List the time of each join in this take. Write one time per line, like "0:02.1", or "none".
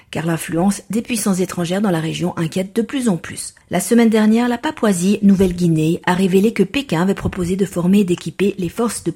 0:03.6